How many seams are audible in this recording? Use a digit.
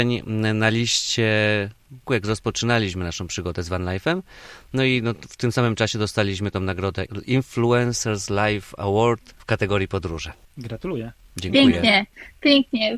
2